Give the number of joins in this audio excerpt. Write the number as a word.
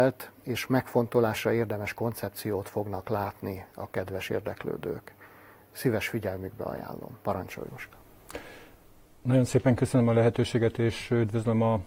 one